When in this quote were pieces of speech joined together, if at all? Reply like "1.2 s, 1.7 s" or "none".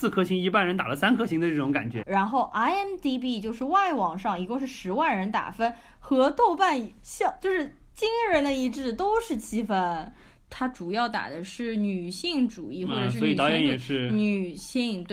2.0 s, 10.4 s